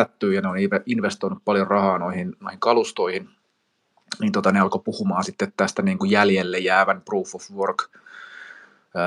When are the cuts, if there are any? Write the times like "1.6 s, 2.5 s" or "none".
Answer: none